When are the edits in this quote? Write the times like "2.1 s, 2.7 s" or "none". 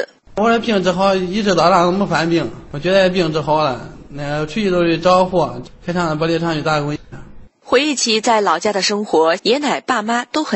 7.1 s, 9.4 s